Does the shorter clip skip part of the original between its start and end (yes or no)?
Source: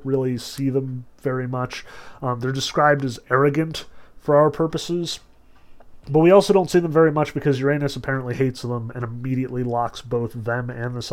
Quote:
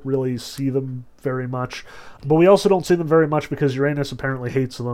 yes